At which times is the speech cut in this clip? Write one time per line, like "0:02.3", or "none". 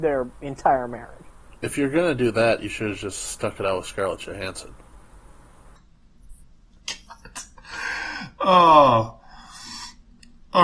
0:01.5
0:05.8